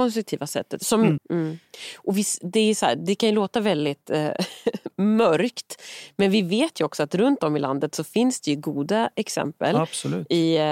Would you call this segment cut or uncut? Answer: cut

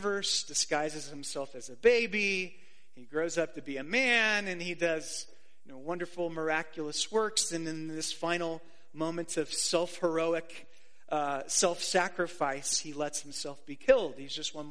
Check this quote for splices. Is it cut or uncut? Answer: uncut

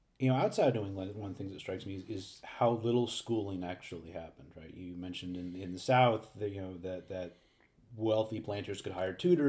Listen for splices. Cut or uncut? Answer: uncut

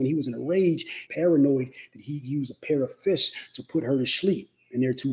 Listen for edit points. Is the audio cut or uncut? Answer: cut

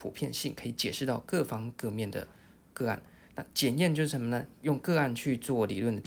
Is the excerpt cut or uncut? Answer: uncut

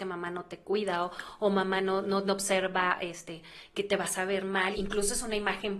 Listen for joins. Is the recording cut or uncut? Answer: cut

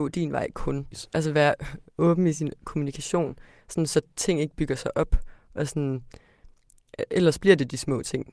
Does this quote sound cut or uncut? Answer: cut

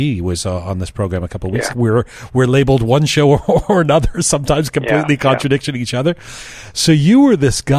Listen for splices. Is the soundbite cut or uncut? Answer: cut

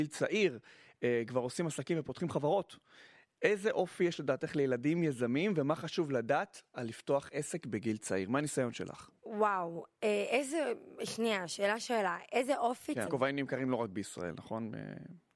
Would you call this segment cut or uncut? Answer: cut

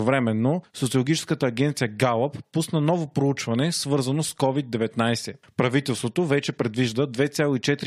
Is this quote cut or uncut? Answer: cut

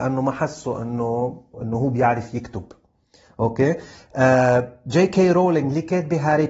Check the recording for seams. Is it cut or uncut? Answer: cut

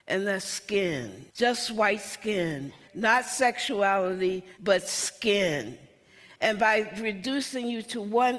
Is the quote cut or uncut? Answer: cut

